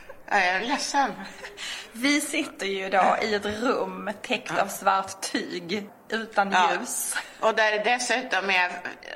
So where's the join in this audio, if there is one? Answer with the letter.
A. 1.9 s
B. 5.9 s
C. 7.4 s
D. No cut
B